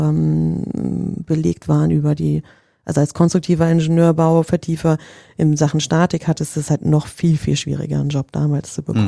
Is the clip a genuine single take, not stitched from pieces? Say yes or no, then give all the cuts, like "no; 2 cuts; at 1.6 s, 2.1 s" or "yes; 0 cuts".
yes; 0 cuts